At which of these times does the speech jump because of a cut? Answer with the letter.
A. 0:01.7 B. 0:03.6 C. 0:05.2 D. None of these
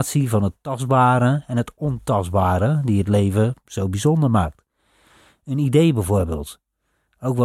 D